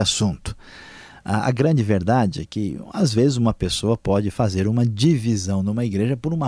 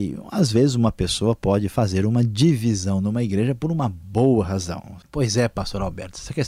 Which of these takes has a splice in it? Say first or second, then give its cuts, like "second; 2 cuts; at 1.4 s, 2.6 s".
second; 1 cut; at 5.0 s